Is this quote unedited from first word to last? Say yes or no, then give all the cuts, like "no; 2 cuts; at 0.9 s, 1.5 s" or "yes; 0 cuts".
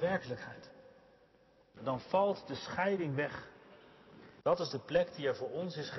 no; 2 cuts; at 1.8 s, 4.4 s